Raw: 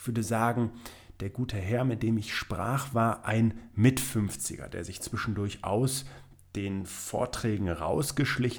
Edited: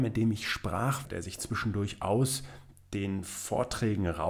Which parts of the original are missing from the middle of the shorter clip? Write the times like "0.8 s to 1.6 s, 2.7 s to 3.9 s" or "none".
2.9 s to 4.7 s